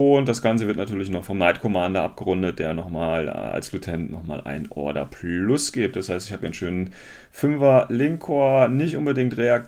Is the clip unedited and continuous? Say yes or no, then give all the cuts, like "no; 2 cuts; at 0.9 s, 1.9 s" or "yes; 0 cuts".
yes; 0 cuts